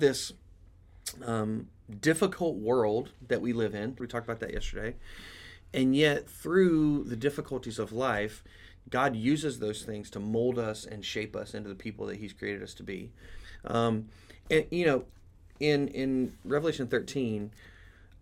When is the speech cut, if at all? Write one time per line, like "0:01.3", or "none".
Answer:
0:04.0